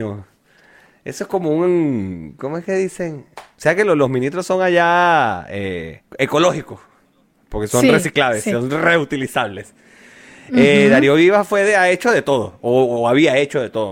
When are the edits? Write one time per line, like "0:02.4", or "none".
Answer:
0:03.3
0:06.1